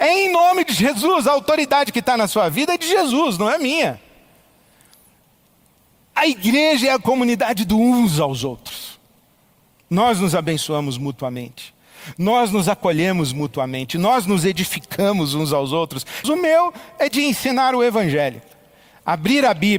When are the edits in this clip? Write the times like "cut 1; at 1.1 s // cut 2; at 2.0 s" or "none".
cut 1; at 16.2 s